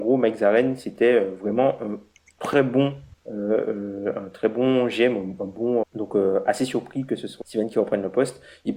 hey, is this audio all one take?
no; 2 cuts; at 5.8 s, 7.4 s

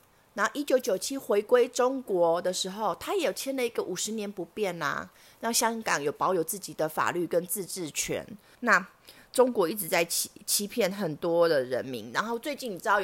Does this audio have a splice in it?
yes; 1 cut; at 8.6 s

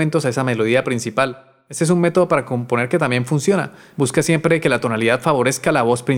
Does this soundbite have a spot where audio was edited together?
yes; 1 cut; at 3.9 s

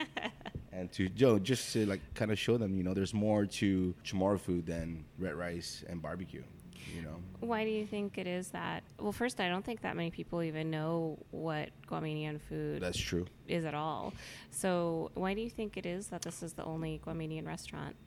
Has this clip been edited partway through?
no; 0 cuts

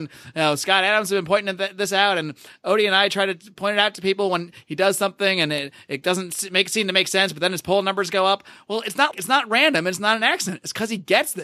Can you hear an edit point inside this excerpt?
yes; 1 cut; at 9.1 s

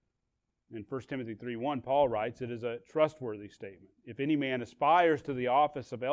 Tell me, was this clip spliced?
no; 0 cuts

